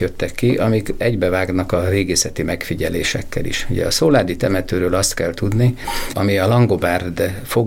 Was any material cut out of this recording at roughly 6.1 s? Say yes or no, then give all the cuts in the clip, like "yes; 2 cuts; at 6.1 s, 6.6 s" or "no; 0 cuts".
yes; 1 cut; at 6.1 s